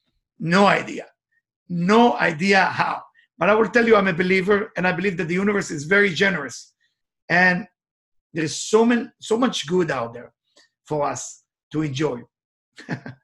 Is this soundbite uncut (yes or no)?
yes